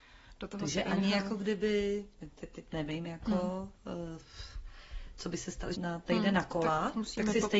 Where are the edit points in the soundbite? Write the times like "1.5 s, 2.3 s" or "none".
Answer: 5.7 s